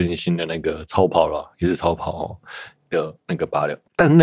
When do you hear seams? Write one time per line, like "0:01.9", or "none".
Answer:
none